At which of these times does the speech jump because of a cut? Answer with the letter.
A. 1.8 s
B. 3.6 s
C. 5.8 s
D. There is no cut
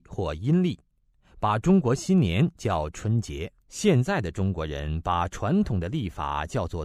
B